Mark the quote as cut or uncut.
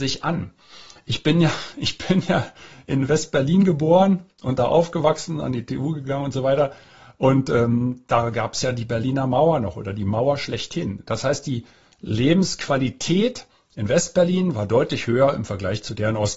uncut